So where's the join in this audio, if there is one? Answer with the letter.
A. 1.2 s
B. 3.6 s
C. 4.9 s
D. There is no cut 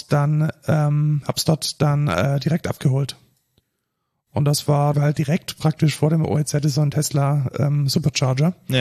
C